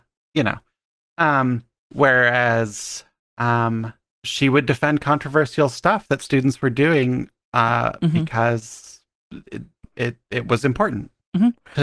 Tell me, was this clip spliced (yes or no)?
no